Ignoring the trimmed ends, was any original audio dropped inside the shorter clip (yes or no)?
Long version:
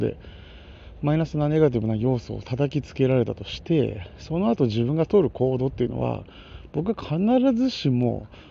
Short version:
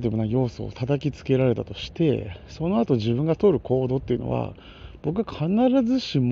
no